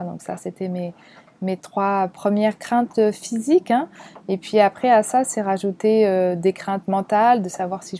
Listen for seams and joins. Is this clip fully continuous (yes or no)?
yes